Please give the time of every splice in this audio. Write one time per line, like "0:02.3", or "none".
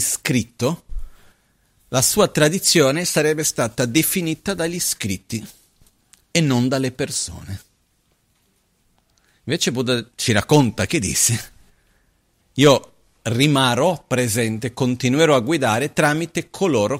0:10.1